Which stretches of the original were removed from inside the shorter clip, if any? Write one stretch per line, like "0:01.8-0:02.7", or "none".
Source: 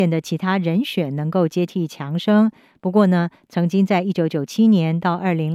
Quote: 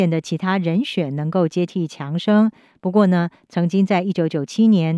none